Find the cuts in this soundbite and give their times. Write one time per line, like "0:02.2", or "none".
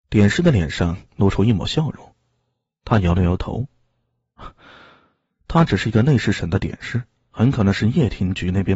0:05.3
0:07.2